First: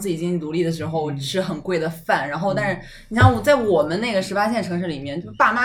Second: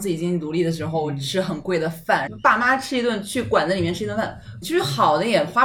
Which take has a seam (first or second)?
second